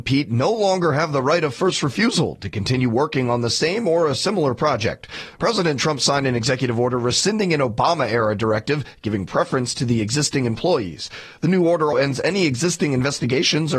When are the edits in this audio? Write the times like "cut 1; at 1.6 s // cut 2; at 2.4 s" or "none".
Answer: cut 1; at 11.9 s